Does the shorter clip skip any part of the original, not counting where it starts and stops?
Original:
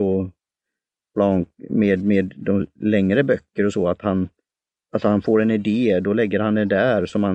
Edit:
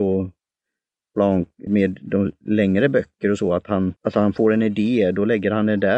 yes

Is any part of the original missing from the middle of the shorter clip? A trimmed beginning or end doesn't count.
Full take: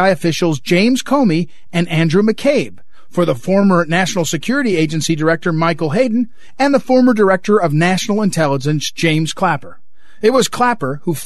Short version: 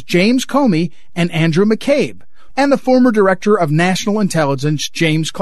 yes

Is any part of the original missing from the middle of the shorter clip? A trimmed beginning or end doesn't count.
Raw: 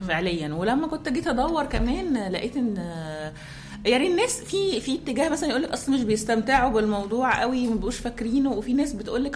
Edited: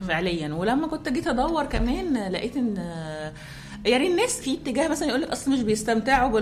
yes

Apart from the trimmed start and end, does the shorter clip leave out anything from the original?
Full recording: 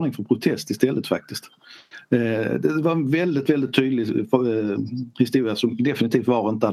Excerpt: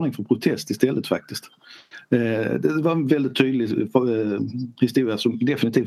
yes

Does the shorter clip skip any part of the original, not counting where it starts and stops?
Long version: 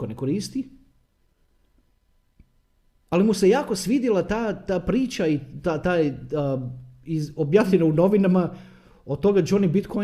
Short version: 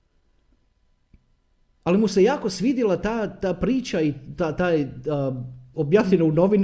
yes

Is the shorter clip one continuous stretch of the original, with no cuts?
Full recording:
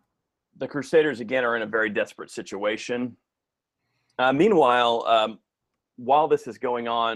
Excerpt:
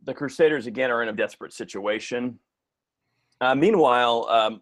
no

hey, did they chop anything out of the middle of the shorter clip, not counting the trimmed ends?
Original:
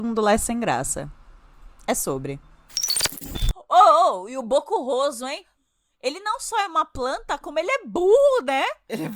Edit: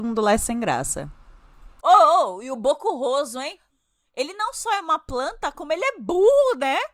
yes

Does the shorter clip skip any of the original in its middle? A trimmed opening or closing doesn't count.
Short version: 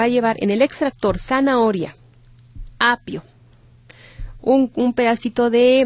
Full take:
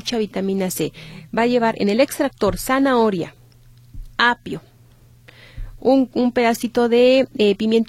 no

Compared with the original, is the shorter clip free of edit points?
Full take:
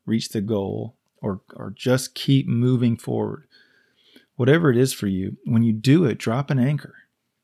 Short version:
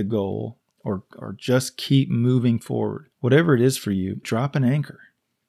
no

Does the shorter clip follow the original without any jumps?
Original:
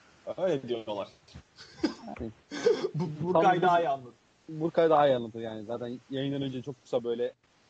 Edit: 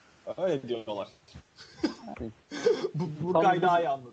yes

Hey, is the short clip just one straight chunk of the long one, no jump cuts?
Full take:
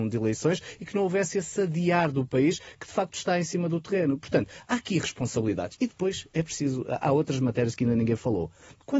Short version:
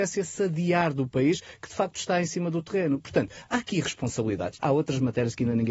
no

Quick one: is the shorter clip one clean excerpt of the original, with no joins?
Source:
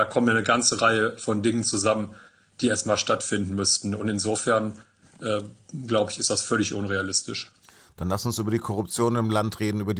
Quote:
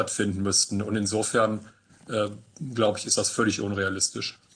yes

